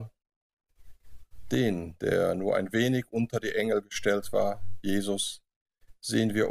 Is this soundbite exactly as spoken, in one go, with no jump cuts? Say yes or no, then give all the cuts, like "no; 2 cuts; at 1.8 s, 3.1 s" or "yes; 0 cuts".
yes; 0 cuts